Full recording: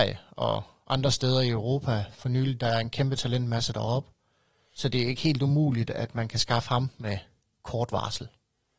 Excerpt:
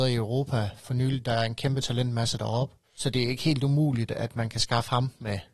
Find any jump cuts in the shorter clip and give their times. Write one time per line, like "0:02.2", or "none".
0:02.8